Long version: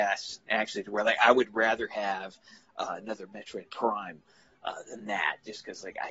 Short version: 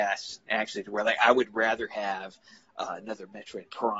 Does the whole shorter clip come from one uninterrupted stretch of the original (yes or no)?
yes